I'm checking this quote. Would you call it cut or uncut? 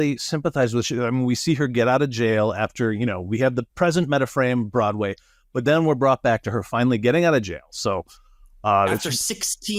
uncut